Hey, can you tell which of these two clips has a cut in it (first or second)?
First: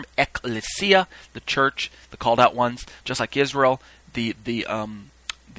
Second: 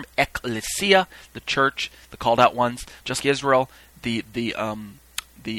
second